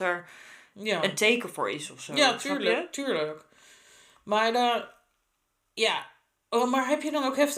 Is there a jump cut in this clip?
no; 0 cuts

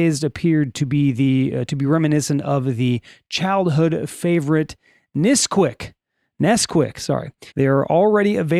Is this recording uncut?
no; 1 cut; at 7.5 s

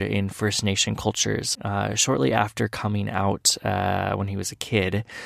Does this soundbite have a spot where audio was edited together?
yes; 1 cut; at 1.5 s

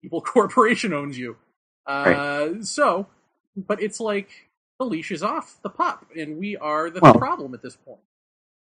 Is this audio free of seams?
no; 2 cuts; at 3.8 s, 7.1 s

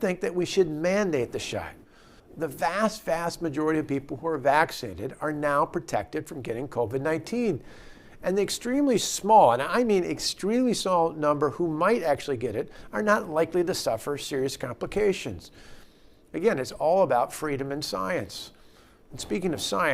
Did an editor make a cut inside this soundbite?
yes; 1 cut; at 2.2 s

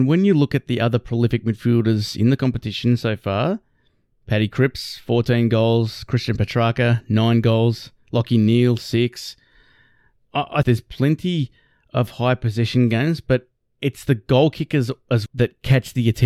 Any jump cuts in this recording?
yes; 2 cuts; at 10.6 s, 15.3 s

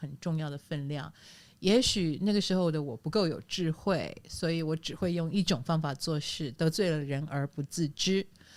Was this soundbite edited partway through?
no; 0 cuts

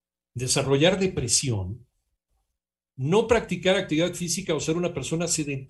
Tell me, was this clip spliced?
no; 0 cuts

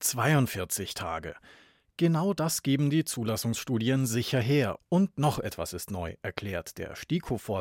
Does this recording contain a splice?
yes; 1 cut; at 4.8 s

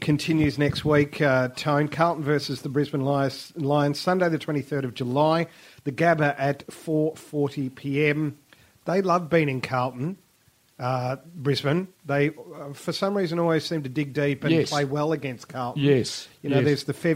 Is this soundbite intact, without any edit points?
yes; 0 cuts

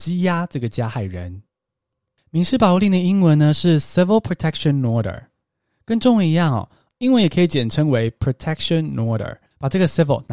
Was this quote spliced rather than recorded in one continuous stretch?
no; 0 cuts

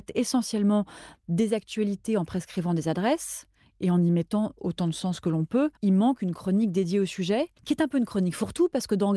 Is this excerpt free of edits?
no; 2 cuts; at 5.8 s, 7.6 s

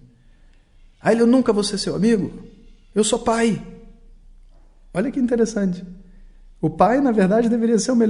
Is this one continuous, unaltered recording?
yes; 0 cuts

